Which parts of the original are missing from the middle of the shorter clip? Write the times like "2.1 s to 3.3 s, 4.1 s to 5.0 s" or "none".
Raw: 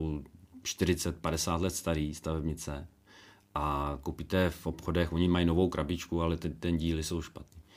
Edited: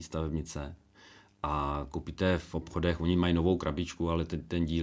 none